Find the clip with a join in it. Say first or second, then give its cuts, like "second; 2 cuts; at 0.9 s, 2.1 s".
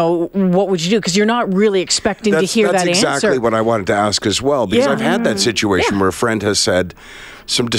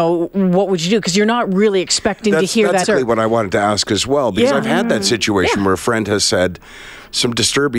second; 1 cut; at 2.8 s